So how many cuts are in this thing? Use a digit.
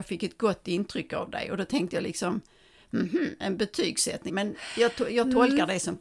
1